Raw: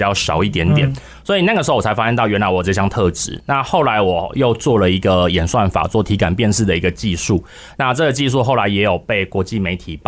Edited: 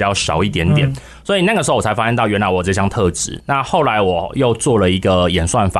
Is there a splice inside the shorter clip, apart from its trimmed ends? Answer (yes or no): no